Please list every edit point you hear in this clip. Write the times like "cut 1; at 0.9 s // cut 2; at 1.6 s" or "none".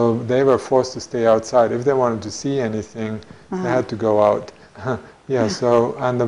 cut 1; at 4.7 s